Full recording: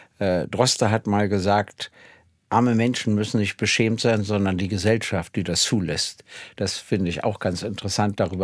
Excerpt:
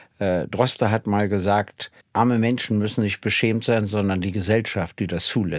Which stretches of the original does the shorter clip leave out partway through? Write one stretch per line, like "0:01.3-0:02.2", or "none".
0:02.0-0:02.4